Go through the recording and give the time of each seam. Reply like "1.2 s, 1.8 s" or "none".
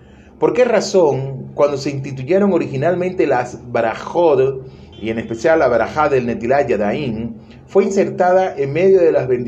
4.9 s